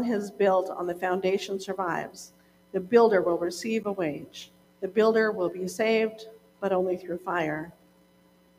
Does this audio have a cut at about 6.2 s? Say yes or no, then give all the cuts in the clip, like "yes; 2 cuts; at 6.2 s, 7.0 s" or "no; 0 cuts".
no; 1 cut; at 4.6 s